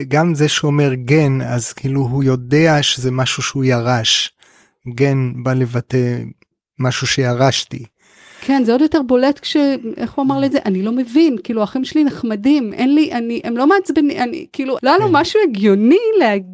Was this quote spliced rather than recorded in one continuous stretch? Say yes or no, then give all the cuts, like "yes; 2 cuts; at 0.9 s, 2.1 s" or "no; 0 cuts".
yes; 1 cut; at 14.8 s